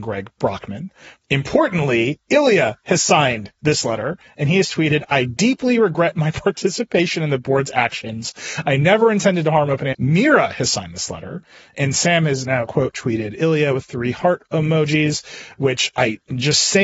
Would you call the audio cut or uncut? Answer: cut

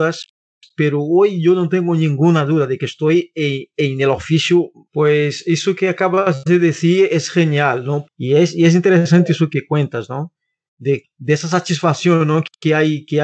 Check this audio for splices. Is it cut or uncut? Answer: cut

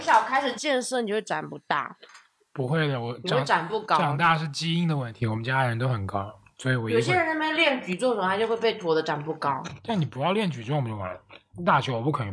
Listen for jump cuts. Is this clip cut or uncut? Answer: uncut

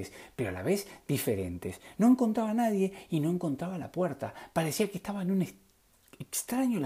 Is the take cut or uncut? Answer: uncut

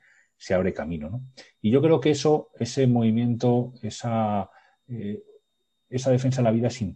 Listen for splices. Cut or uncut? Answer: uncut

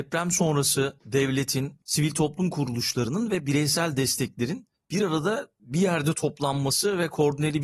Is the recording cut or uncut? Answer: cut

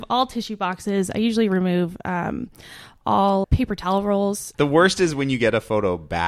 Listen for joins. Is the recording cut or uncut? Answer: cut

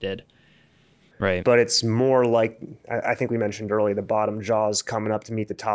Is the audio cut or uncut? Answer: cut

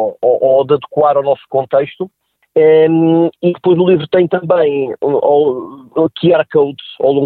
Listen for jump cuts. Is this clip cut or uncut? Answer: uncut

